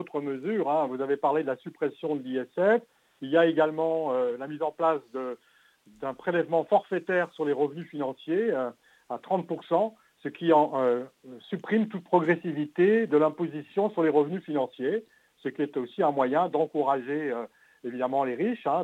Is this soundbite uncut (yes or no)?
yes